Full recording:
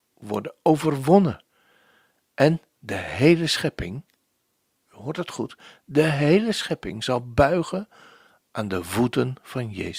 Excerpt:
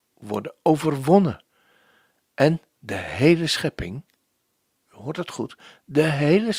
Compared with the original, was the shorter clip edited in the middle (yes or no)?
no